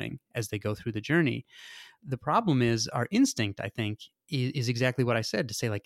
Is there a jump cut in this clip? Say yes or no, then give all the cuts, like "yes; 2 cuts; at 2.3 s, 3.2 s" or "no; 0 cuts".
no; 0 cuts